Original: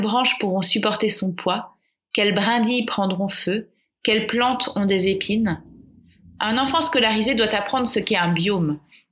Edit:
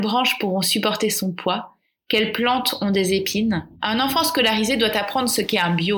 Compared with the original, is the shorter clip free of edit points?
no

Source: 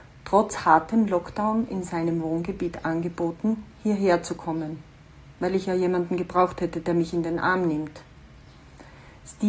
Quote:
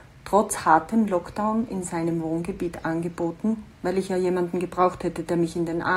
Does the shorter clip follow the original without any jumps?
no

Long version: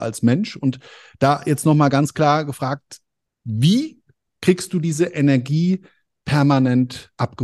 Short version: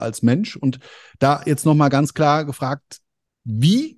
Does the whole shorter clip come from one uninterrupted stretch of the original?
yes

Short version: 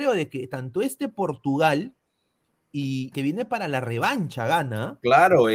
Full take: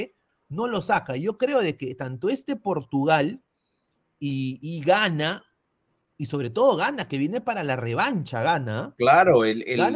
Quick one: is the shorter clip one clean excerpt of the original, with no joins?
no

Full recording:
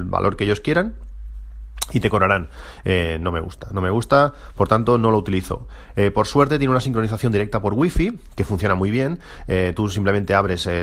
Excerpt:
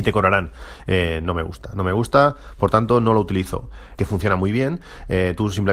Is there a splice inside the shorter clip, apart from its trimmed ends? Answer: yes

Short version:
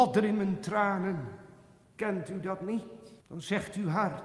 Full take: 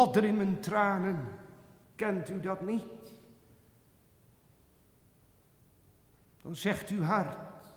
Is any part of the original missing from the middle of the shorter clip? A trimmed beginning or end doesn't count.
yes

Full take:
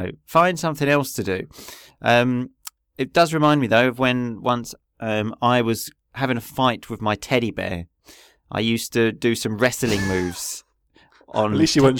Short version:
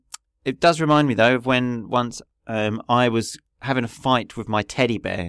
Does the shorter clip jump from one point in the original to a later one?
no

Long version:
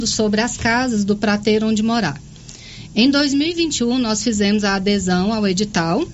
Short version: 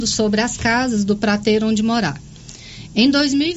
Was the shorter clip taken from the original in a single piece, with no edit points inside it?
yes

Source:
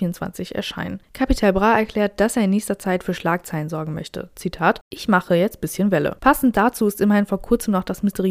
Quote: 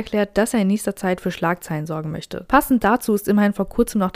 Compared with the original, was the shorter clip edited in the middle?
yes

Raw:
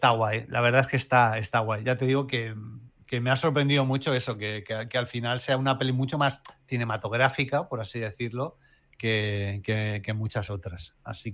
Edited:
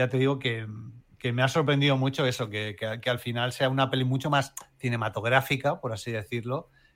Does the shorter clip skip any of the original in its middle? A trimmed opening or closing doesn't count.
no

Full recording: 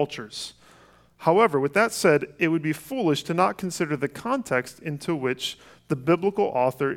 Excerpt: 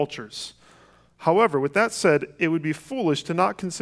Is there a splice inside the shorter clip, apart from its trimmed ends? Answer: no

